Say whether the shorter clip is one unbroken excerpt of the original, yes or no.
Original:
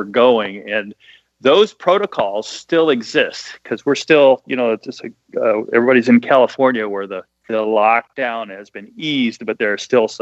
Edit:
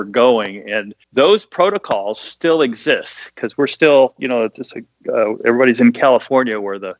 no